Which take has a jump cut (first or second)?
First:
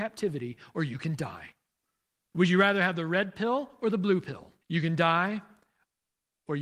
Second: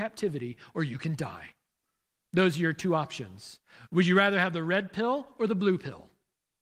first